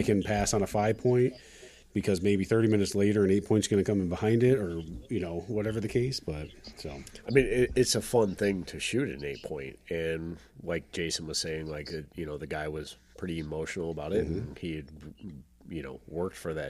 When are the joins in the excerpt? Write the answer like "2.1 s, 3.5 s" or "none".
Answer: none

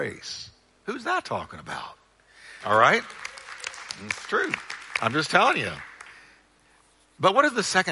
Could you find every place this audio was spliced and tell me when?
2.6 s

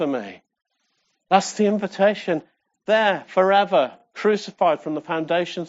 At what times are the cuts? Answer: none

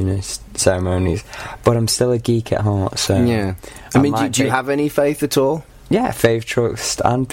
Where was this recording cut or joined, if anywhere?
none

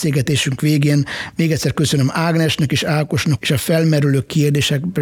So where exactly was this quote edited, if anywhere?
3.4 s

